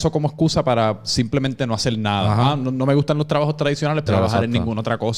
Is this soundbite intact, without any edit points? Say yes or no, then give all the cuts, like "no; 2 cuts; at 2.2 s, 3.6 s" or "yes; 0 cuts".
no; 1 cut; at 4.1 s